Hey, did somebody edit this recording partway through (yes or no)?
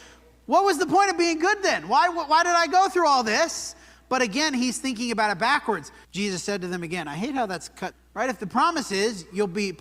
yes